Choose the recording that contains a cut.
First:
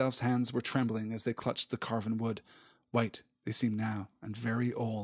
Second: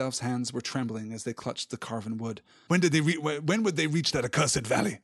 second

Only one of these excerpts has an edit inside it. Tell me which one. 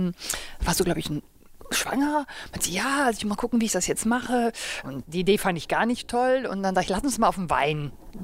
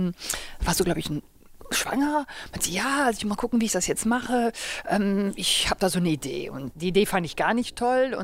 first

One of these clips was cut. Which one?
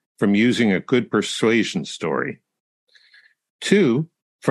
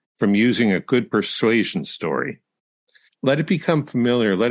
second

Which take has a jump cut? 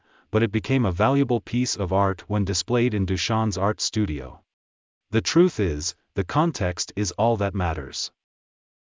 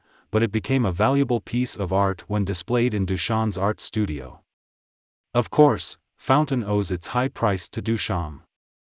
first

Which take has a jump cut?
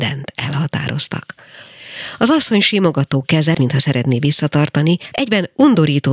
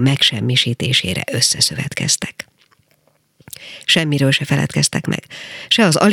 first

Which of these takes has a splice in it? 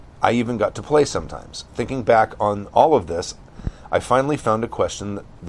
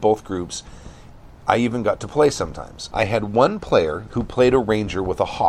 second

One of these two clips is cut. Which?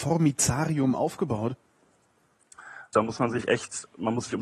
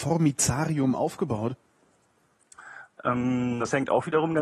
first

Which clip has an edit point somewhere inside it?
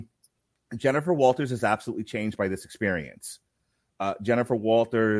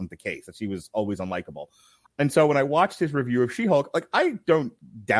second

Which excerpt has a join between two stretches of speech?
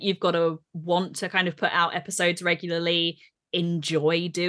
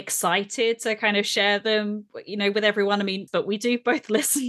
second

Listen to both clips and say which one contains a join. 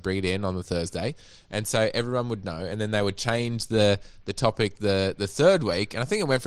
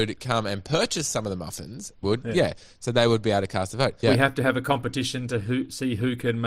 second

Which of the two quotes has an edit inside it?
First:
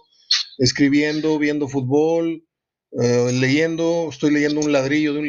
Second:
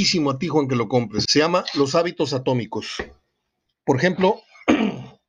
second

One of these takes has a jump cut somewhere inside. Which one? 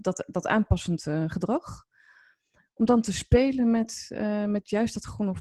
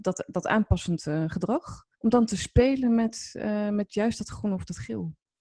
second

